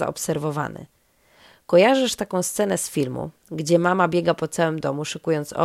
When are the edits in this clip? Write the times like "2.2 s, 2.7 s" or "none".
none